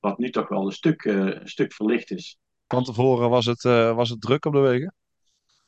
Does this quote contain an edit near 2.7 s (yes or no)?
yes